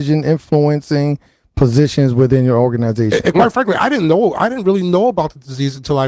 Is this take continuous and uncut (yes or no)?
yes